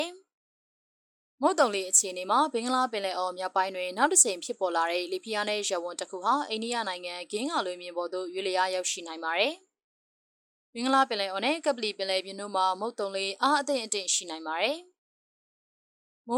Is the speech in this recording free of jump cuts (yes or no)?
yes